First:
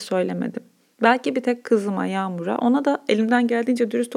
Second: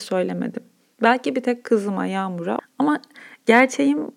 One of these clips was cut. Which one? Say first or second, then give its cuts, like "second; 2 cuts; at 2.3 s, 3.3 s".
second; 1 cut; at 2.6 s